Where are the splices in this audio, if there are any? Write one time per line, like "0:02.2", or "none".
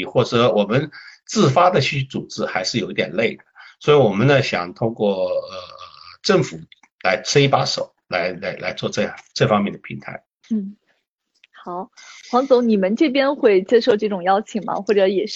0:10.4